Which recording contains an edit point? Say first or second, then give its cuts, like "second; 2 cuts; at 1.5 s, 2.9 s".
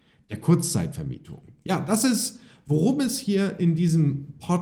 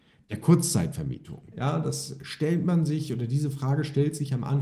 second; 1 cut; at 1.5 s